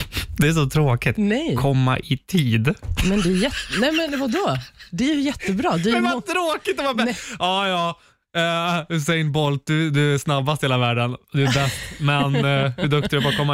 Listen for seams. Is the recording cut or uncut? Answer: uncut